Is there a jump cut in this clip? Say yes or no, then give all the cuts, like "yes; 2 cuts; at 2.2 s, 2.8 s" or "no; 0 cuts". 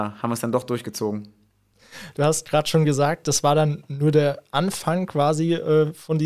no; 0 cuts